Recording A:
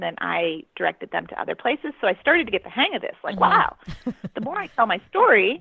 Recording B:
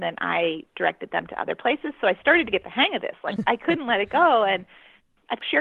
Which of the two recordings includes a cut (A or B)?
B